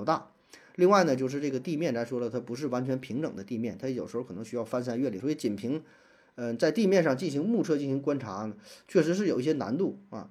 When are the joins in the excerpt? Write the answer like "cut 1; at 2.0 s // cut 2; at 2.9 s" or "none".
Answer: cut 1; at 5.2 s